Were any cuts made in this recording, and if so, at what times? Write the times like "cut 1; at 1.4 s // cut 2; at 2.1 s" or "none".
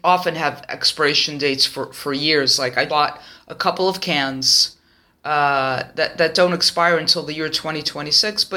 cut 1; at 2.9 s